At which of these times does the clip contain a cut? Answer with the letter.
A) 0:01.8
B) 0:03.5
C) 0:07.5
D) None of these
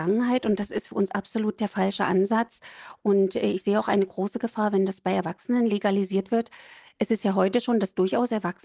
D